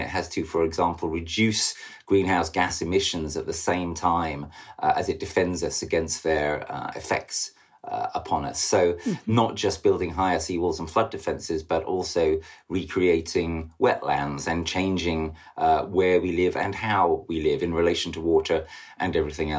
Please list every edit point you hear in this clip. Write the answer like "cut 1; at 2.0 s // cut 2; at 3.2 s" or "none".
none